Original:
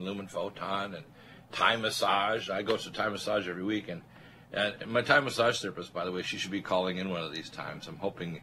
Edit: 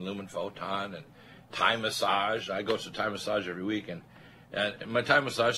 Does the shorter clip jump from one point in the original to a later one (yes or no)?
no